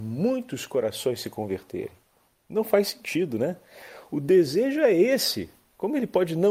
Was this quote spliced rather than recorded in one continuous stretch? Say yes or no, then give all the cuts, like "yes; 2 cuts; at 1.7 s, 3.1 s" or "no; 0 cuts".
no; 0 cuts